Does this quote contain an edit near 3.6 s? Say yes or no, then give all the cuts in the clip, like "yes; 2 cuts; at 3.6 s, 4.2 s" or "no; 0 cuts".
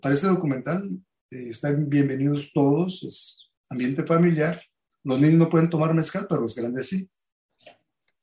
yes; 1 cut; at 3.6 s